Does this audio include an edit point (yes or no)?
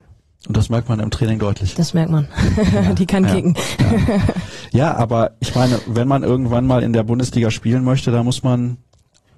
no